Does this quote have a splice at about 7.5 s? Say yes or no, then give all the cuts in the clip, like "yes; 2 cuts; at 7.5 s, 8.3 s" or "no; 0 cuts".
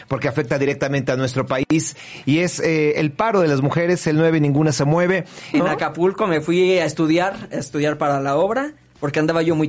no; 1 cut; at 5.5 s